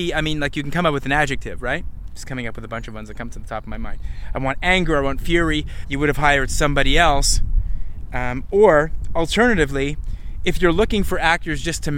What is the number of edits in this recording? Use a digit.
1